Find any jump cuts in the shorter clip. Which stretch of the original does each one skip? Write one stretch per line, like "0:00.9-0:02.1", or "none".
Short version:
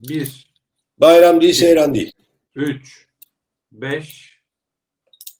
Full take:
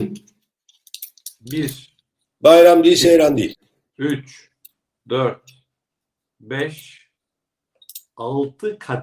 0:05.0-0:06.2